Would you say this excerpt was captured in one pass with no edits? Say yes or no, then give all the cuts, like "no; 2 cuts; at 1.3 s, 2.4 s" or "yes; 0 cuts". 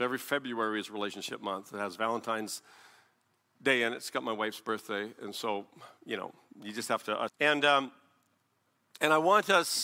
no; 1 cut; at 7.3 s